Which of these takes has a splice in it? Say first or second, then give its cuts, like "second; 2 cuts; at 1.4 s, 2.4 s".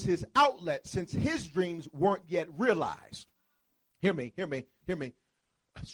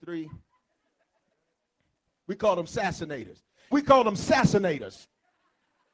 second; 2 cuts; at 2.1 s, 3.7 s